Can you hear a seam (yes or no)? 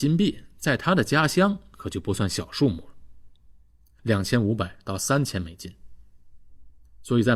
yes